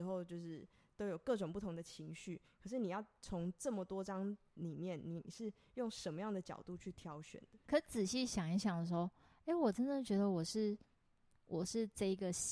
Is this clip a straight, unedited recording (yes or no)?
no